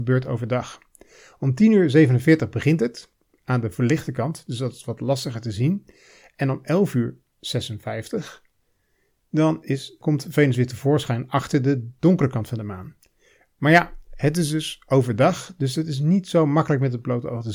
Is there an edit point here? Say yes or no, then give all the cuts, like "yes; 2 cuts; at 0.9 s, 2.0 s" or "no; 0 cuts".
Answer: no; 0 cuts